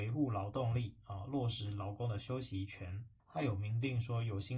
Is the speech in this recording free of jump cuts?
no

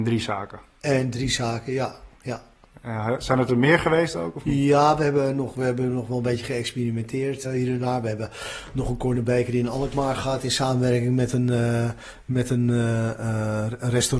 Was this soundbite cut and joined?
yes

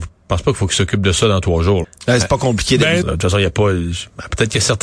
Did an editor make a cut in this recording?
yes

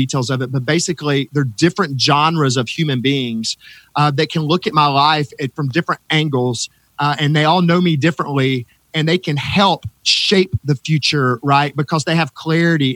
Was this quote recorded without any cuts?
yes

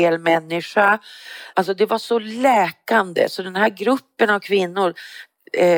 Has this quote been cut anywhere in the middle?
yes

